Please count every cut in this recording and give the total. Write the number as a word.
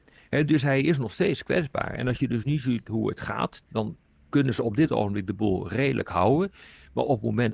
zero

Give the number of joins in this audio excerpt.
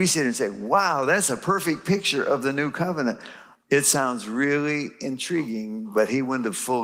one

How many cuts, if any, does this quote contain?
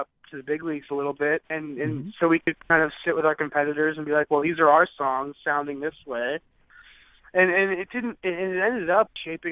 one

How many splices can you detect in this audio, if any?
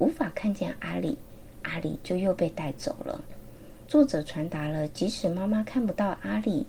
one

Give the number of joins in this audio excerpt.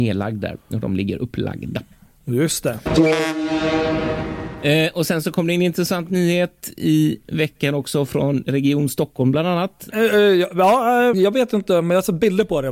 two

